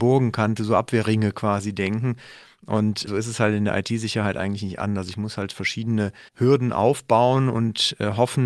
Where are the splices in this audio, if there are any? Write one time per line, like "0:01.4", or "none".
0:06.3